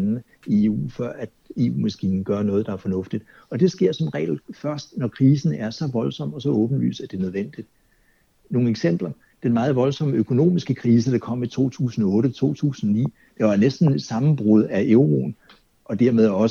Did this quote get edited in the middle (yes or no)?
no